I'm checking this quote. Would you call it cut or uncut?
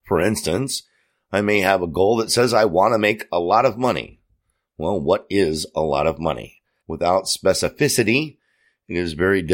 cut